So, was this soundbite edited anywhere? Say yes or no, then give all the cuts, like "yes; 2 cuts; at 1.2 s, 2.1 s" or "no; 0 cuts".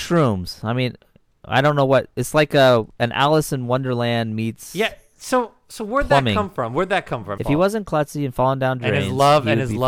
yes; 1 cut; at 7.4 s